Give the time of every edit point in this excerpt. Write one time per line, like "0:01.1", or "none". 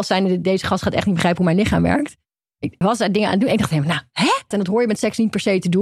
0:02.8
0:04.5